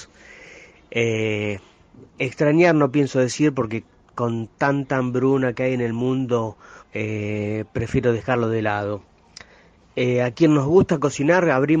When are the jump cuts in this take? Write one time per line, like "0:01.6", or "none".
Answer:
0:06.8